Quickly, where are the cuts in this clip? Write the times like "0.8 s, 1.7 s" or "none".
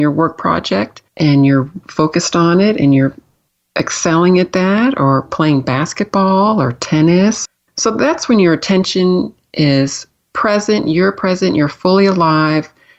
1.1 s

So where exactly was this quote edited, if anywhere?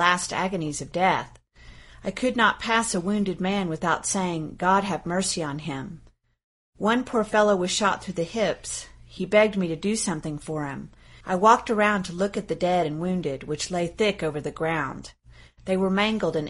11.2 s

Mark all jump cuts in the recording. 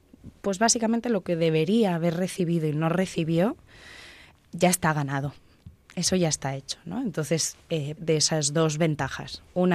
8.0 s

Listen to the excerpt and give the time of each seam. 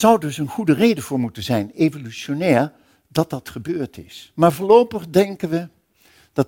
none

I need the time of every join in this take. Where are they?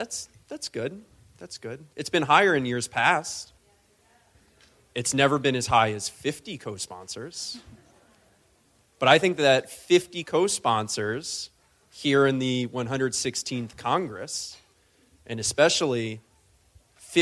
none

